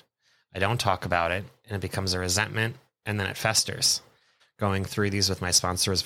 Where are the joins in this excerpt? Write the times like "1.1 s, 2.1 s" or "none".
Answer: 4.4 s